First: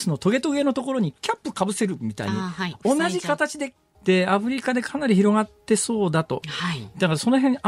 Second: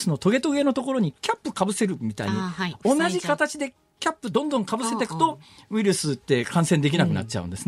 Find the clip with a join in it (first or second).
first